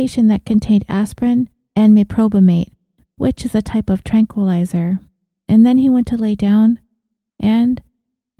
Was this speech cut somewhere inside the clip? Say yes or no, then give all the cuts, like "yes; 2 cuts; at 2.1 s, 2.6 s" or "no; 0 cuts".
no; 0 cuts